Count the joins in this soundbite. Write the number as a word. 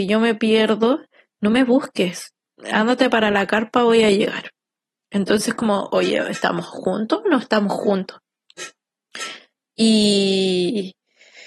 zero